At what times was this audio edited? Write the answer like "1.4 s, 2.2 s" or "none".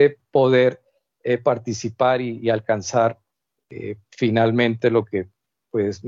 none